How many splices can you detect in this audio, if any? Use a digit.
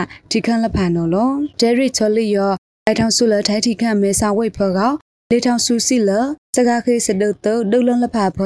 2